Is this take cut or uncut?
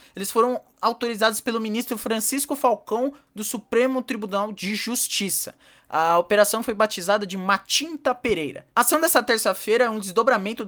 cut